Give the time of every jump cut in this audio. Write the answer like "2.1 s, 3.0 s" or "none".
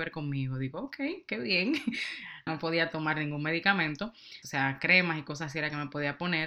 2.5 s, 4.4 s